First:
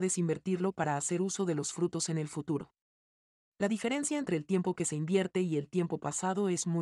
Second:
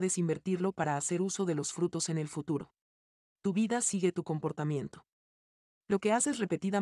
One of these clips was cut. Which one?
second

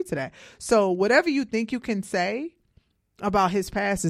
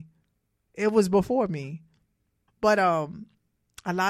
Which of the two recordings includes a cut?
second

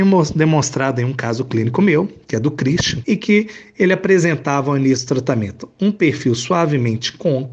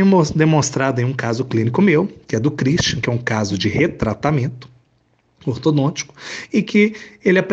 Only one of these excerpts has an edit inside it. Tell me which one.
first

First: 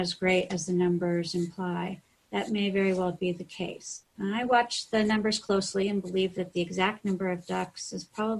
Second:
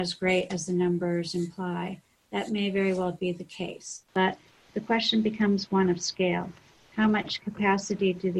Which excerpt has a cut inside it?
second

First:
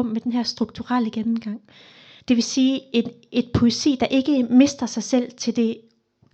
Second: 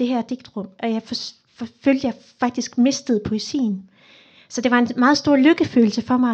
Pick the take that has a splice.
first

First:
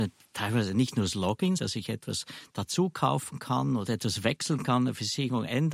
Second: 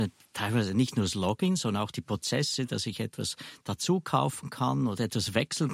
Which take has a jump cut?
first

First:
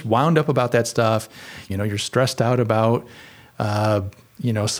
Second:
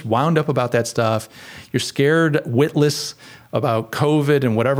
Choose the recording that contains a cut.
first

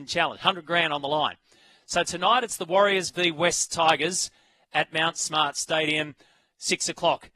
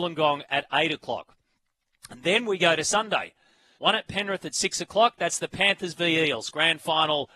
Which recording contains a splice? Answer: second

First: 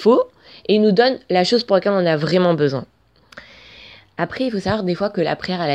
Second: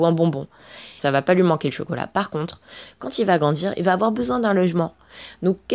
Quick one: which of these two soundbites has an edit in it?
second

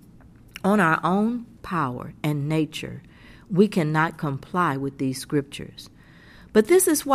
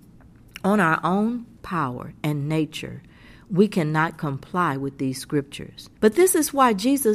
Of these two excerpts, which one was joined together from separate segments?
second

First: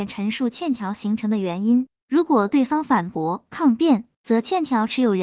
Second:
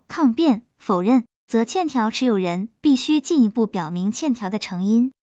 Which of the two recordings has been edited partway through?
first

